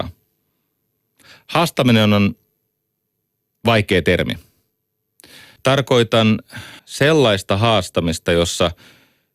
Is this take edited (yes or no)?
yes